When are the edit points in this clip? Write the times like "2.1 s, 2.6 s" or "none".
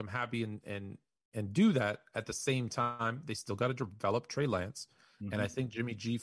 none